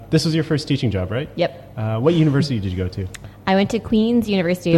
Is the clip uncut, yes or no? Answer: yes